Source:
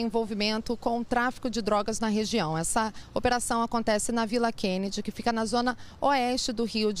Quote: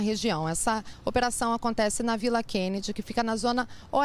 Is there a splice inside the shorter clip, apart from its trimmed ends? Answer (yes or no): no